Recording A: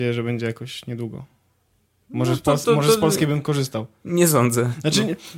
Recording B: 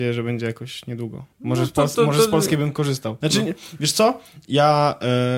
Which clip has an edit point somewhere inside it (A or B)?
B